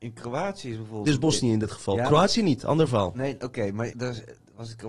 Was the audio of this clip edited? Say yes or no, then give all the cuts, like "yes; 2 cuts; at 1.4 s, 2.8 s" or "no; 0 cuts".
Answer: yes; 1 cut; at 3.9 s